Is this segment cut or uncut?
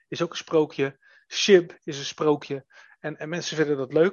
uncut